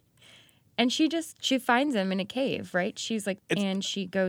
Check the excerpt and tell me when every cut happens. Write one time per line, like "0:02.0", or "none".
0:03.4